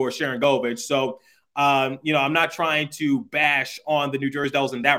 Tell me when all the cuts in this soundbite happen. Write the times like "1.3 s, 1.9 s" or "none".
none